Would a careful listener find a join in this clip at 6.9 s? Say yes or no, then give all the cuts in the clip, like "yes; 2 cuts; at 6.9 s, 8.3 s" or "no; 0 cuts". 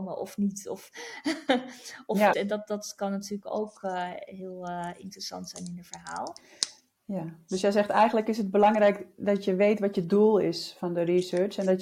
no; 1 cut; at 2.3 s